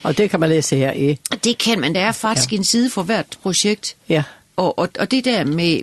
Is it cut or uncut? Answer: uncut